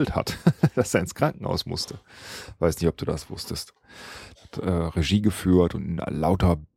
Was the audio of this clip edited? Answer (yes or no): yes